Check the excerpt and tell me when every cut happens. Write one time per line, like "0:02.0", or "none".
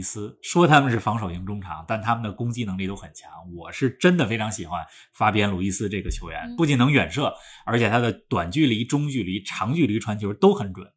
none